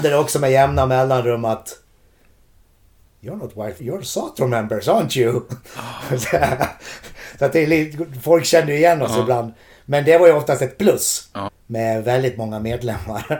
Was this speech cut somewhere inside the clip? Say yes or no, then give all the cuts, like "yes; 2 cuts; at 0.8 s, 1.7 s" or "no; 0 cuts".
yes; 2 cuts; at 3.8 s, 11.5 s